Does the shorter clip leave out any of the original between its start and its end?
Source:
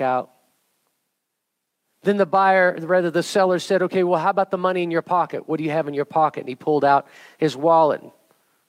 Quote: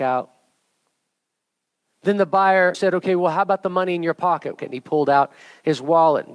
yes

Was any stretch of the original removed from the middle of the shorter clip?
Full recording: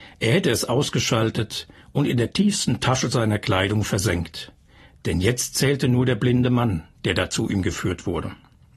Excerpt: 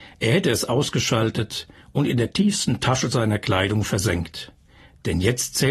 no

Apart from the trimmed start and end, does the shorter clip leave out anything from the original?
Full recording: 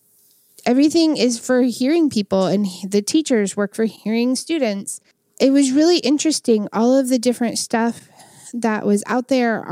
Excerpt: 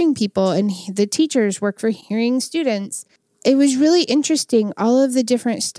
no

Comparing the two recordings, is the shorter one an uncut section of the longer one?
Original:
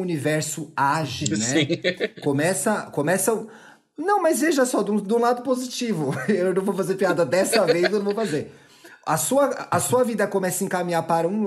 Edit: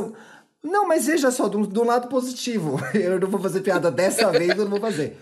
yes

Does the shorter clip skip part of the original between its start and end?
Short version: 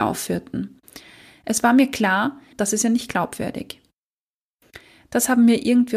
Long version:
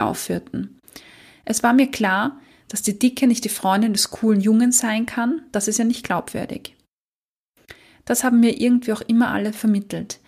yes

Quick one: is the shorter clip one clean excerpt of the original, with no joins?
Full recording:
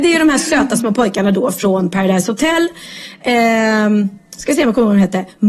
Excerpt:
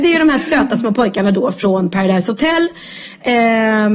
yes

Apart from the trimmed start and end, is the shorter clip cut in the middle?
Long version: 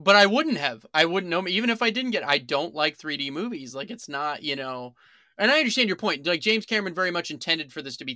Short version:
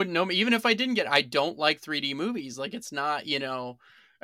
no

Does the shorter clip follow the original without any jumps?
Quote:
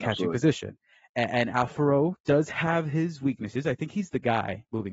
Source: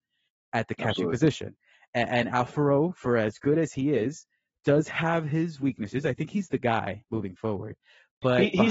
no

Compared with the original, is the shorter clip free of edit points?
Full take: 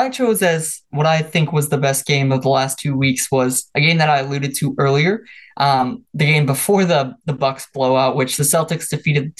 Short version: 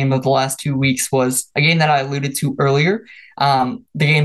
yes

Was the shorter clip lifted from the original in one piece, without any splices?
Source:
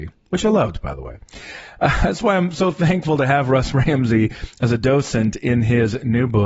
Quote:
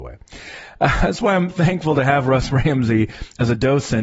no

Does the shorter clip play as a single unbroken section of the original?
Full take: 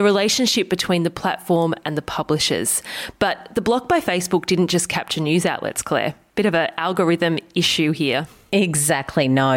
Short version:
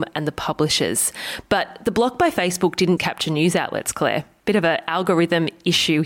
no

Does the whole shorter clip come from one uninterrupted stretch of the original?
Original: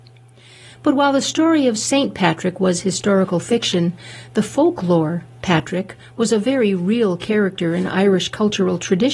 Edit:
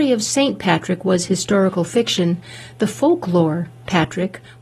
yes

